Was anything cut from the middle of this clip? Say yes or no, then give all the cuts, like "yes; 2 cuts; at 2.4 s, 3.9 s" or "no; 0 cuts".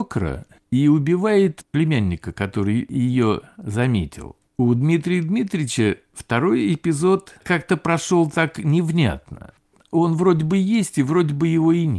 yes; 1 cut; at 4.5 s